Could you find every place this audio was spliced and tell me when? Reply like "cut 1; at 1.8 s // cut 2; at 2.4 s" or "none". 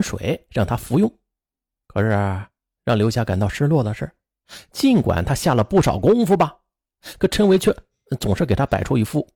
cut 1; at 1.8 s